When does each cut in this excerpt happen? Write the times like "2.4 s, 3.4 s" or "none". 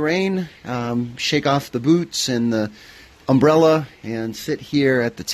none